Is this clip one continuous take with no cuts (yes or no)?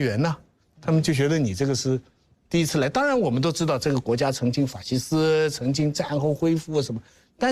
yes